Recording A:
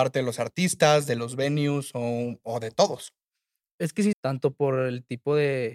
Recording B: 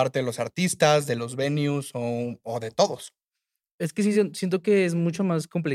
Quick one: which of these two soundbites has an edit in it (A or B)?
A